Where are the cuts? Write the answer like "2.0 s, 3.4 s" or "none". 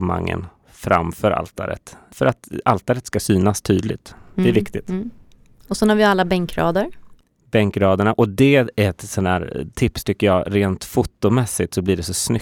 none